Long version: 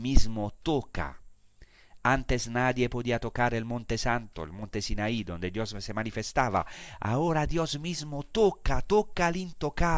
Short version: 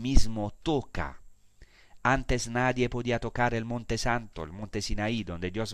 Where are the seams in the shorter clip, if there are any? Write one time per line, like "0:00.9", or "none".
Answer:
none